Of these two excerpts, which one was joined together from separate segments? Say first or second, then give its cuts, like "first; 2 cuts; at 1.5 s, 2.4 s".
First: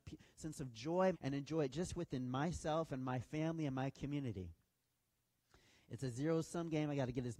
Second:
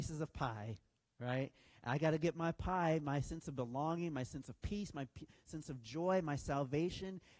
first; 1 cut; at 1.1 s